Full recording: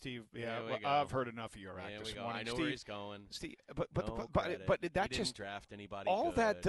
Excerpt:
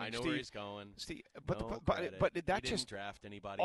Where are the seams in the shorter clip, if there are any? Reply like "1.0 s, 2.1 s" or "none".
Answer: 1.4 s